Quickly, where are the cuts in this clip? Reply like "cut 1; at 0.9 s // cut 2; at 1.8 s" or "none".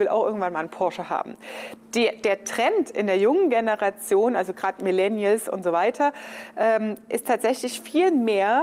none